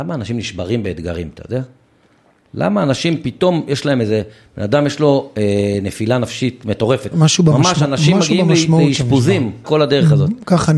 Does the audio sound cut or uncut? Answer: cut